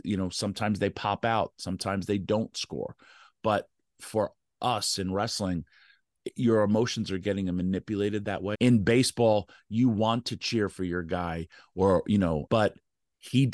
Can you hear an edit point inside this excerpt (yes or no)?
yes